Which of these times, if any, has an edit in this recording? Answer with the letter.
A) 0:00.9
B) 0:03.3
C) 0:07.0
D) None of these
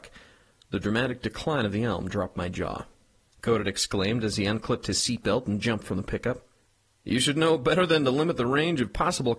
B